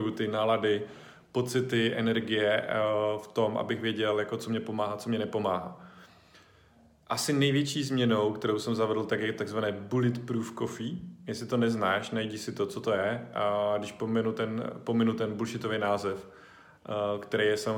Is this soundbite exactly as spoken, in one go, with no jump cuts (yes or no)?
yes